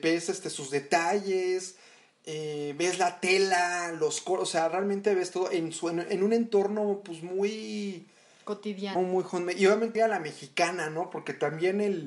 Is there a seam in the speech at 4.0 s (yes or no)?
no